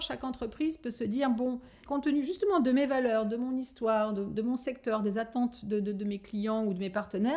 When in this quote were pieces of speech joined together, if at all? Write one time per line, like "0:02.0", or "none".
0:01.8